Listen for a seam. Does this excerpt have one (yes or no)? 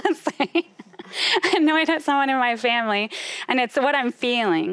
no